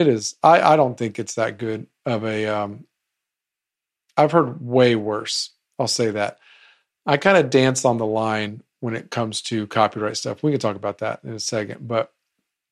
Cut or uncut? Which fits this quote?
uncut